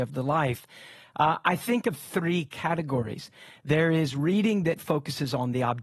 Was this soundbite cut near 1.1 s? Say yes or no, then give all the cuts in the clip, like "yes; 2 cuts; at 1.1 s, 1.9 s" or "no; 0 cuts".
no; 0 cuts